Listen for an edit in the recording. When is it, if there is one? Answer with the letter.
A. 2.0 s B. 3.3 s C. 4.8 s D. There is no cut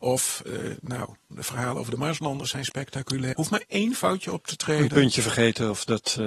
B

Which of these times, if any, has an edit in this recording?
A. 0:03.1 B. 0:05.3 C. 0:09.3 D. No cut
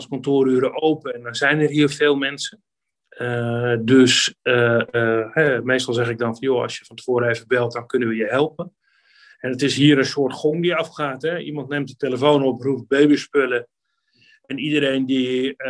D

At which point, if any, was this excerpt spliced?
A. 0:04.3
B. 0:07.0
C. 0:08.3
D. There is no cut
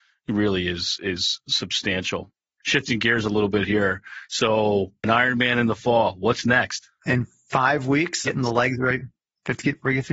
C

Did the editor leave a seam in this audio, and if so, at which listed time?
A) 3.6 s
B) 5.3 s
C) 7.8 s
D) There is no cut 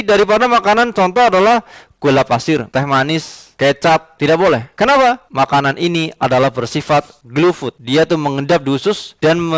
D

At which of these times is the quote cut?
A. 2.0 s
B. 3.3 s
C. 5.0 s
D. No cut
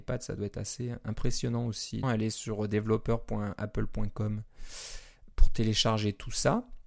A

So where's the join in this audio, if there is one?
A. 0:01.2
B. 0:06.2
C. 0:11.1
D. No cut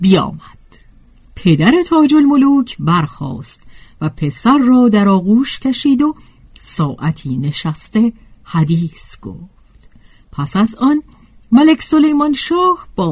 D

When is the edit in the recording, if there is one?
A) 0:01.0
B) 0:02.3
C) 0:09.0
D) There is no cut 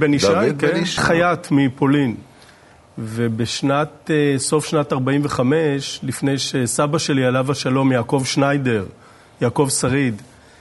A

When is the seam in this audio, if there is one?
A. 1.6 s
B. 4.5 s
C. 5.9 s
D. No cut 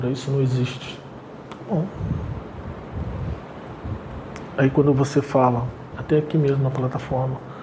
C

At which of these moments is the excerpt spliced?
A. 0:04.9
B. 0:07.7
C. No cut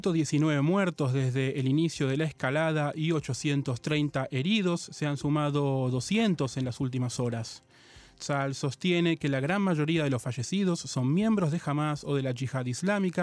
C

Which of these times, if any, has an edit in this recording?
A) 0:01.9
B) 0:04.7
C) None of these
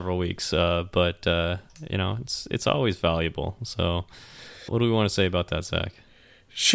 B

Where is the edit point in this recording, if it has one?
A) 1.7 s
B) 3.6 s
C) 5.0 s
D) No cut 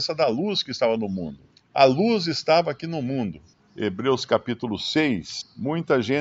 B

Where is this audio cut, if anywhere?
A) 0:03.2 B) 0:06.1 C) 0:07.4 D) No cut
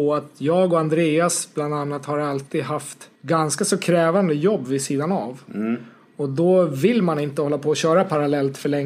A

